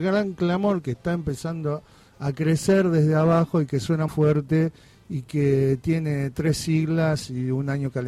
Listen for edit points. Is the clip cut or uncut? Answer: cut